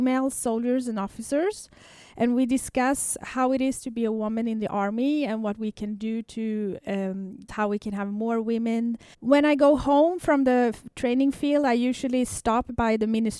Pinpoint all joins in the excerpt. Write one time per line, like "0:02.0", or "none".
0:07.5
0:09.1